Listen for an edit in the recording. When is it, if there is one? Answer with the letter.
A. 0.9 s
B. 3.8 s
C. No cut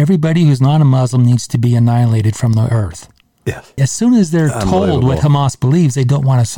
B